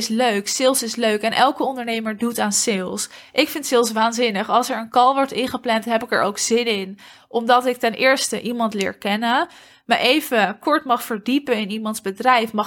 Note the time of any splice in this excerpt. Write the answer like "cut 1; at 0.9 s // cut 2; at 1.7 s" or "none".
none